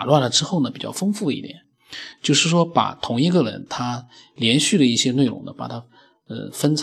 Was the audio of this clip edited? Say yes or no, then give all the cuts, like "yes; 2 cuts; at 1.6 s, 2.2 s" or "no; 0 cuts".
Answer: no; 0 cuts